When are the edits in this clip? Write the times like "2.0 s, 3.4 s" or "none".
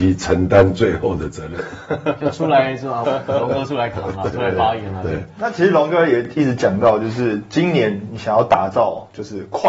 3.0 s